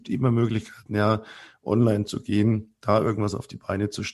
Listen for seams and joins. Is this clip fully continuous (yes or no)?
yes